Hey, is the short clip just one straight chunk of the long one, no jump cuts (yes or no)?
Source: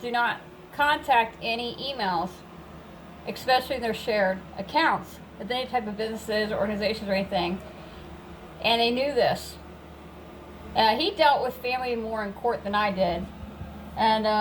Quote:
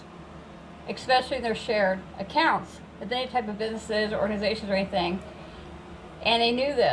yes